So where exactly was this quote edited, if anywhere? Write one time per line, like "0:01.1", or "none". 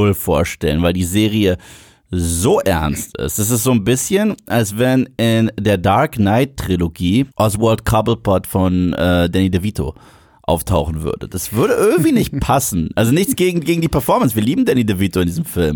0:07.3